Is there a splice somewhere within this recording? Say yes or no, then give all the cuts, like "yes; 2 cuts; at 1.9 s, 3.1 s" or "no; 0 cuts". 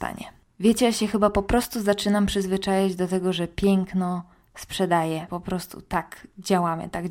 yes; 1 cut; at 5.3 s